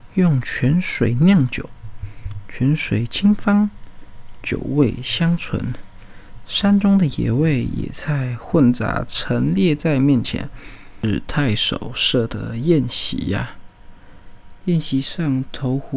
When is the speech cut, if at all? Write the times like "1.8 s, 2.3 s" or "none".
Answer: 14.6 s